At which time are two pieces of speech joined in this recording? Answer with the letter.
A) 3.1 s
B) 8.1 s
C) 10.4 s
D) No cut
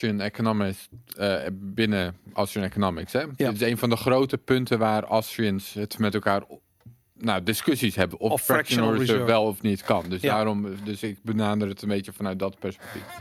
B